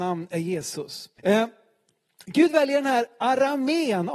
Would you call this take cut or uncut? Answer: cut